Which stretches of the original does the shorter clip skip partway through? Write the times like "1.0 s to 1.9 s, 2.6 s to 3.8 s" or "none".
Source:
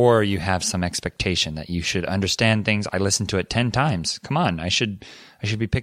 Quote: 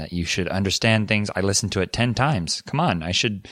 none